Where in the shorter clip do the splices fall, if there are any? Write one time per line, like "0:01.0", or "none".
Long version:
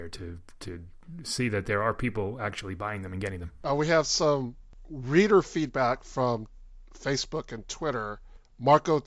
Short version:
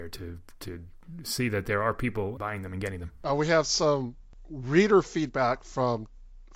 0:02.4